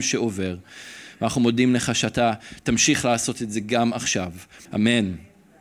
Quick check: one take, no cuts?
no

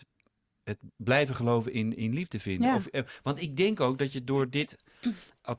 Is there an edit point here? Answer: no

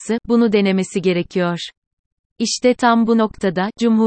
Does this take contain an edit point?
no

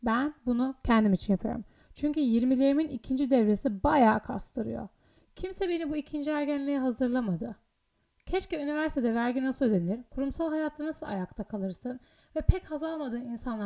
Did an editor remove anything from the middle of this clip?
no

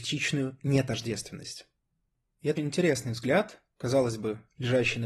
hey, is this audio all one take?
no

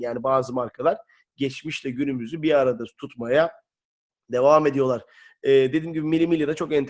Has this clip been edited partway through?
no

